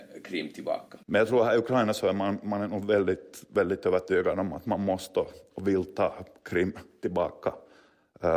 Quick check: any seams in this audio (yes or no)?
yes